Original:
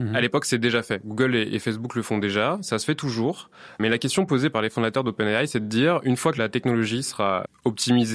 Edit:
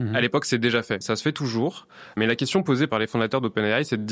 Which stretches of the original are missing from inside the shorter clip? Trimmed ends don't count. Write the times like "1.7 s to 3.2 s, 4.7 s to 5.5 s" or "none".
1.0 s to 2.6 s